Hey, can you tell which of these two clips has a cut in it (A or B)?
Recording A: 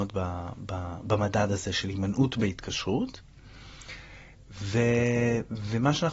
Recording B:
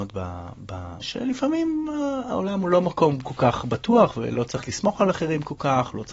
B